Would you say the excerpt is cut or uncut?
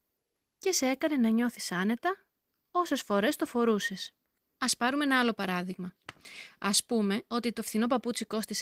uncut